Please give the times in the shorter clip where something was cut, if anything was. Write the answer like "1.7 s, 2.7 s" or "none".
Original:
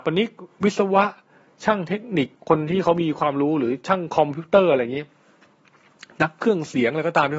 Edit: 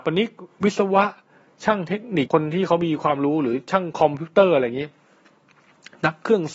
2.3 s